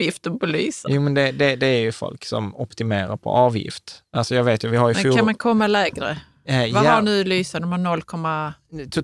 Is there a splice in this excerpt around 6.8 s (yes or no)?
no